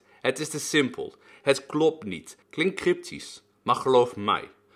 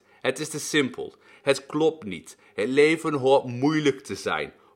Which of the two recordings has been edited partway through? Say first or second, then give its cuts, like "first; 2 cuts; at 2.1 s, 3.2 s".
first; 1 cut; at 2.4 s